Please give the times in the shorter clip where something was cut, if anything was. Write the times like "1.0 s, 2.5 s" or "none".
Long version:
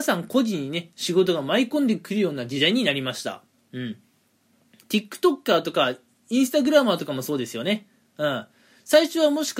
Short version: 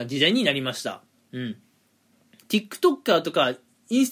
none